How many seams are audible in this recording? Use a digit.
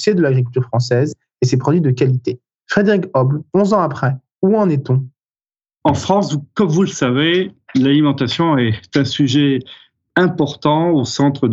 0